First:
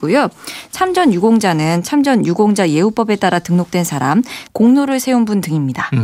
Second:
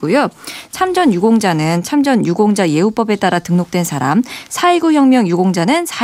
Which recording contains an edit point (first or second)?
first